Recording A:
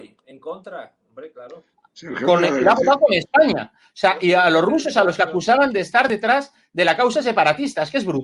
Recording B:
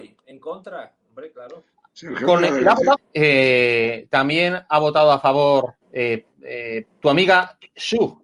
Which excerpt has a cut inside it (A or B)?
B